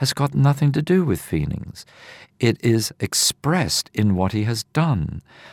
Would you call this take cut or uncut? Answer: uncut